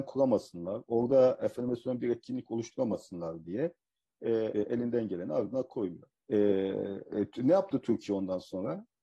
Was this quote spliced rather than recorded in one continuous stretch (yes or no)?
yes